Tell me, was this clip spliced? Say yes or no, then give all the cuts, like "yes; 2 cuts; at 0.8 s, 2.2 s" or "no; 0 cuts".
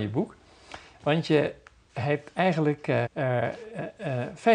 yes; 1 cut; at 3.1 s